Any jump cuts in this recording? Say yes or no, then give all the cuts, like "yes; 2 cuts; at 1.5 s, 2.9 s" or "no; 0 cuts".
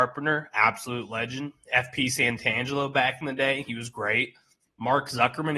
yes; 1 cut; at 4.6 s